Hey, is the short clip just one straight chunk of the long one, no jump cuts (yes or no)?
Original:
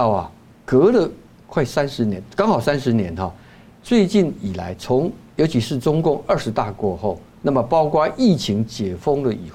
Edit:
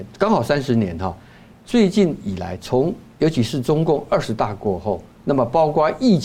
yes